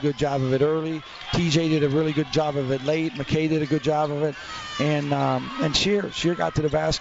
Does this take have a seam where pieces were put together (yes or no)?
no